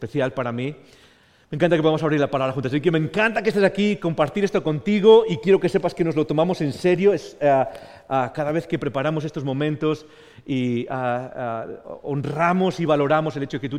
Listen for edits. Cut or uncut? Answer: uncut